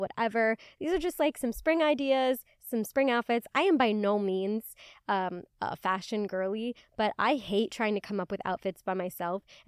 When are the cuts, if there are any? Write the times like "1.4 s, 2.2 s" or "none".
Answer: none